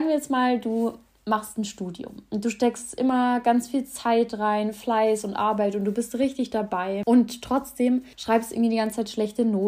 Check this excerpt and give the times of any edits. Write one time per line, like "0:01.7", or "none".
0:08.1